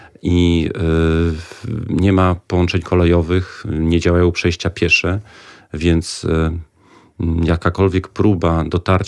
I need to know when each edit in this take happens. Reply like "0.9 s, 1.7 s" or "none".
none